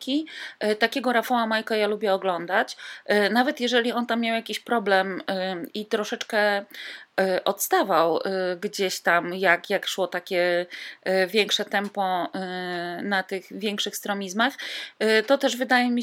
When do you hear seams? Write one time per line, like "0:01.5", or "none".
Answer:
none